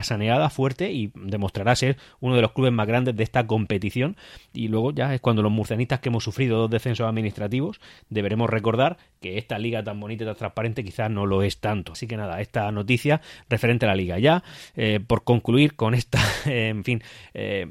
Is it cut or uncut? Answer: cut